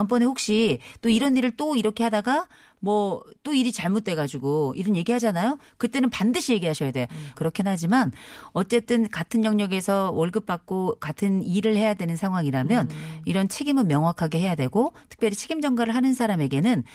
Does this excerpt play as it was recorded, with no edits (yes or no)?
no